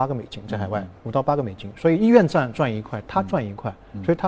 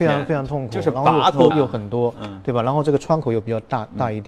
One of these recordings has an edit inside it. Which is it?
second; 1 cut; at 1.5 s

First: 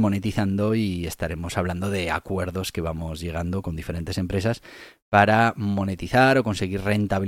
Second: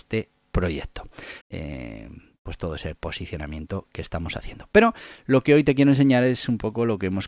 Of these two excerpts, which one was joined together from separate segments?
second; 1 cut; at 1.4 s

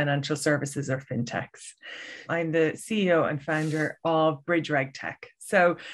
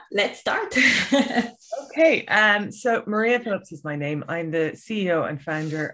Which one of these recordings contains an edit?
first; 1 cut; at 2.3 s

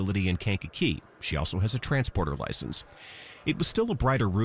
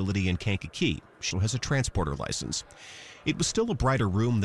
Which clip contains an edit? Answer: second; 1 cut; at 1.3 s

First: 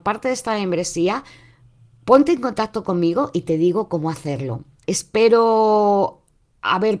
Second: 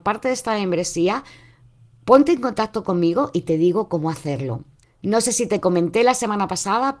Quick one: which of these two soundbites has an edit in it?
first; 1 cut; at 4.9 s

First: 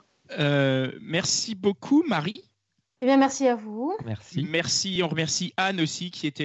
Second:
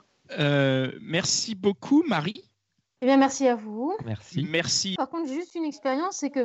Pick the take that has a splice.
second; 1 cut; at 5.0 s

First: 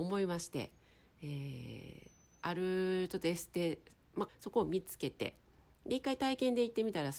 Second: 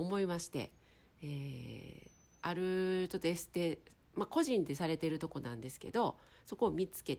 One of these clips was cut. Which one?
first; 1 cut; at 4.3 s

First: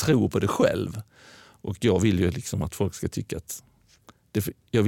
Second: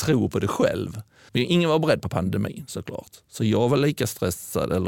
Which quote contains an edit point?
second; 1 cut; at 1.3 s

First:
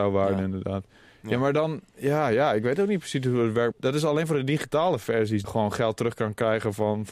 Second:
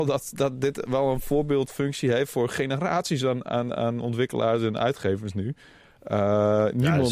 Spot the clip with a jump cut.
first; 2 cuts; at 3.7 s, 5.4 s

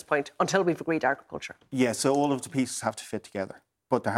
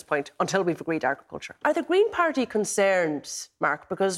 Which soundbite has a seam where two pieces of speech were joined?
second; 1 cut; at 1.6 s

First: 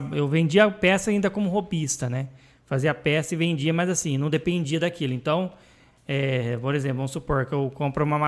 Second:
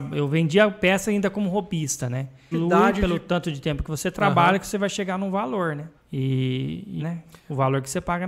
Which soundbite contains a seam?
second; 3 cuts; at 2.5 s, 5.9 s, 7.0 s

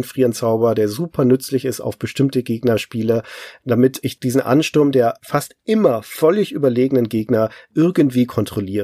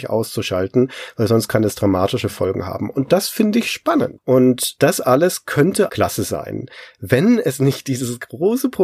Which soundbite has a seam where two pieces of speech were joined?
second; 2 cuts; at 4.2 s, 5.9 s

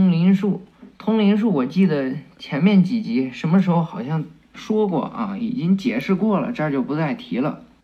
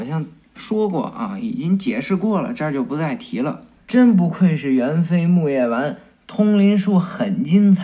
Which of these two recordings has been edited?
second; 1 cut; at 3.8 s

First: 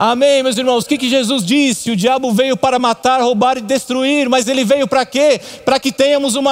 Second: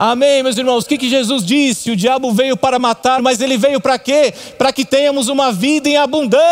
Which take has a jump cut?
second; 1 cut; at 3.2 s

